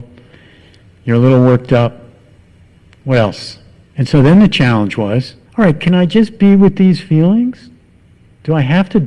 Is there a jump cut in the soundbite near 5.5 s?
yes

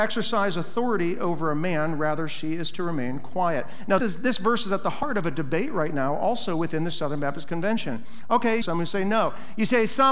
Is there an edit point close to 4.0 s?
yes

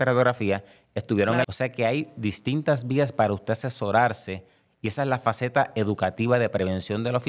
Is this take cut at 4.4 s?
no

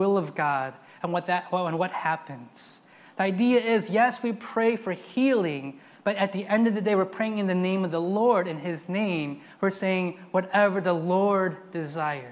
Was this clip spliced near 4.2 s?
no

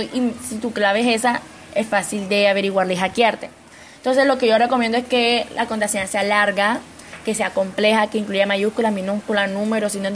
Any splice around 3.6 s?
no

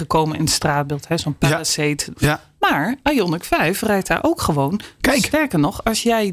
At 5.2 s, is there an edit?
no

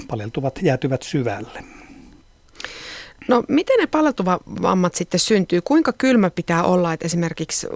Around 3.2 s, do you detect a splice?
no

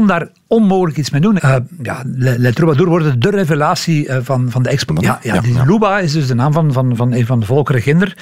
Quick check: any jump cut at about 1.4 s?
yes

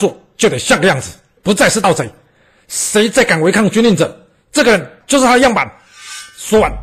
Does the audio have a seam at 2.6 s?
no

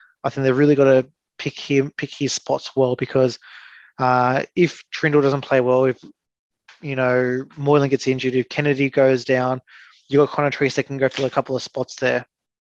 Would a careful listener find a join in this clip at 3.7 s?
no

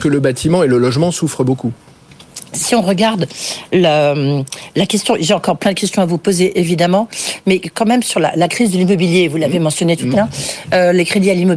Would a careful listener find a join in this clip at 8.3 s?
no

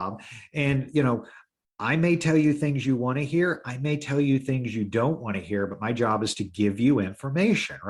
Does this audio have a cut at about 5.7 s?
no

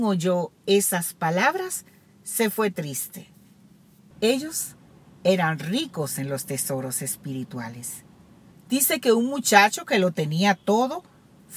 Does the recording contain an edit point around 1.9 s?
no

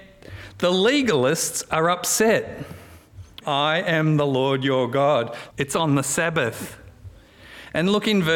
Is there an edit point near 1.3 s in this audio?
no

